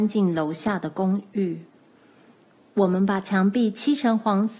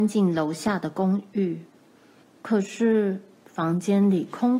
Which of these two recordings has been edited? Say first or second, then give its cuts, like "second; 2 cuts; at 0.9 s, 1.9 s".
second; 1 cut; at 2.2 s